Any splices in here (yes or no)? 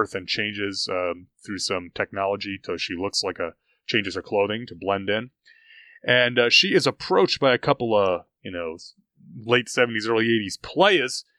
no